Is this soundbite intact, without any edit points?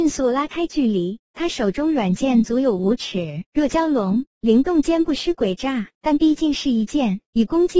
no; 1 cut; at 3.5 s

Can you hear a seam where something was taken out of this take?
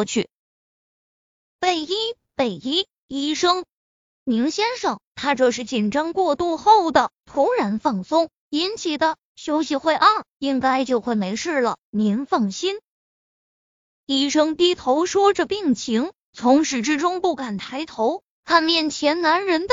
no; 0 cuts

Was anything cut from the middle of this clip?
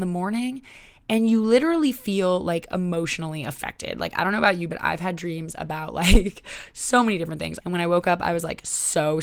yes; 1 cut; at 7.6 s

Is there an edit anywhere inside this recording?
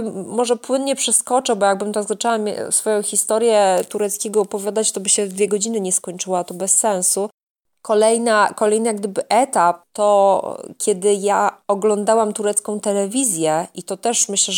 no; 0 cuts

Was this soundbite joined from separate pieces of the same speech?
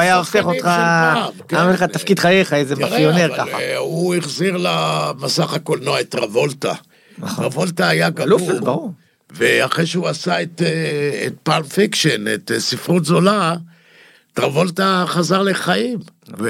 no; 0 cuts

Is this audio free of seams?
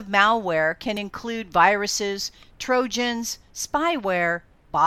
yes; 0 cuts

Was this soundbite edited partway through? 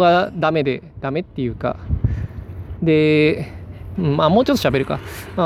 yes; 2 cuts; at 2.8 s, 3.9 s

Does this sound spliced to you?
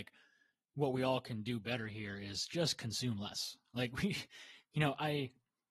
no; 0 cuts

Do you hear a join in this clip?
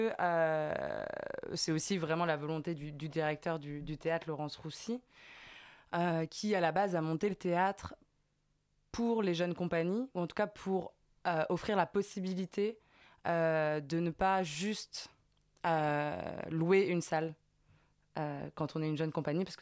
no; 0 cuts

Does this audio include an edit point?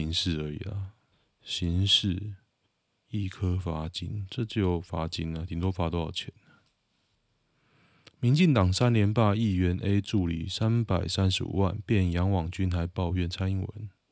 no; 0 cuts

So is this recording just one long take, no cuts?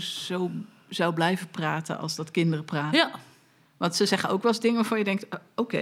yes; 0 cuts

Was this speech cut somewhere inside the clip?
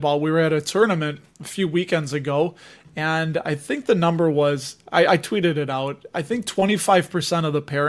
no; 0 cuts

